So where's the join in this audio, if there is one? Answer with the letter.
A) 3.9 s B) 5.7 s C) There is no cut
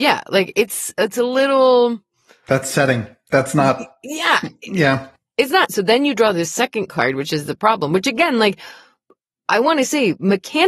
B